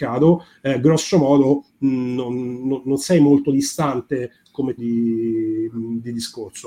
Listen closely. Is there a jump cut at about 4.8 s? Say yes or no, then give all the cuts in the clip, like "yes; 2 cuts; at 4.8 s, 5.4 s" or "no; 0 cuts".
yes; 1 cut; at 4.8 s